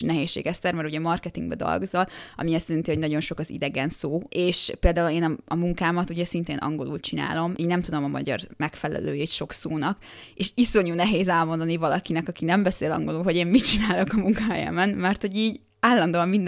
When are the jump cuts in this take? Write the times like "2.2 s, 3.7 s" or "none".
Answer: none